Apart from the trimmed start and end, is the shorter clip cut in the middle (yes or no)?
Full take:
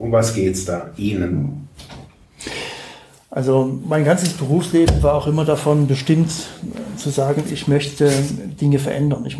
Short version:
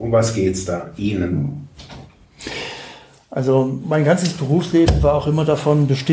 no